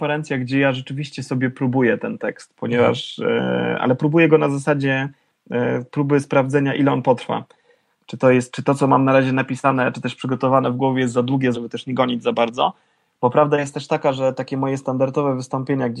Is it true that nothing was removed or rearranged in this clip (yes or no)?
no